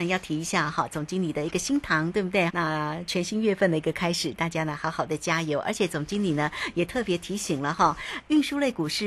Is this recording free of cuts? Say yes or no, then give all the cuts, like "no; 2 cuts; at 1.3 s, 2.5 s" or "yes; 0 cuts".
no; 1 cut; at 2.5 s